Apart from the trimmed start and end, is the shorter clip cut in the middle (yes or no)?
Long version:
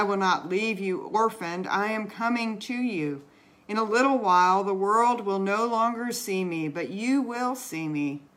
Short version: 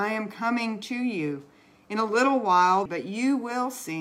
yes